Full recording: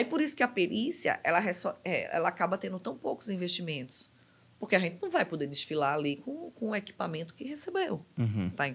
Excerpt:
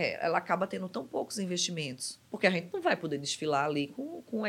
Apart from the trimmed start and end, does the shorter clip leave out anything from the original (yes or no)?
yes